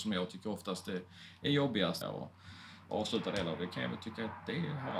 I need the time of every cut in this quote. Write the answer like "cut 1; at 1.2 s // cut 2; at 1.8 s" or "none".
cut 1; at 2.0 s